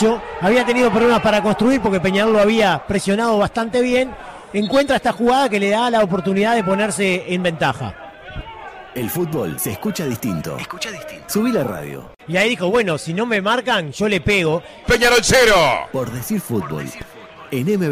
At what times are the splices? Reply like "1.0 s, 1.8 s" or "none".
12.2 s, 14.8 s